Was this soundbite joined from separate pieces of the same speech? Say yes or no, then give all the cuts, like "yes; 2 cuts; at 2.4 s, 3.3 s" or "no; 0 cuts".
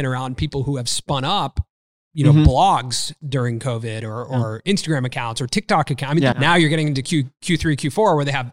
yes; 1 cut; at 6.3 s